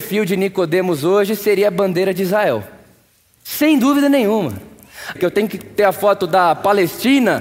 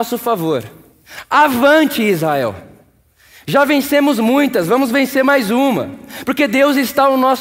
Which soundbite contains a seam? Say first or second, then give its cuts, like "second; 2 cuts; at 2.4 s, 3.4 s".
first; 2 cuts; at 3.4 s, 5.2 s